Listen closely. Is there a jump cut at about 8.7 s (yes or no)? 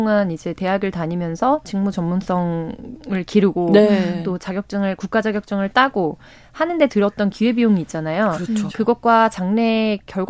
yes